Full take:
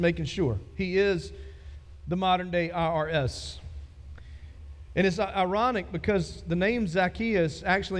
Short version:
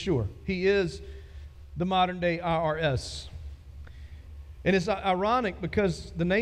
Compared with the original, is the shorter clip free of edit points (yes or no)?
yes